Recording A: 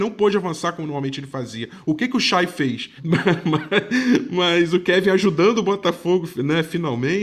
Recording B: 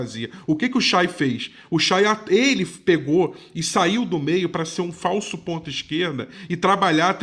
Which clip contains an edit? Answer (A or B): A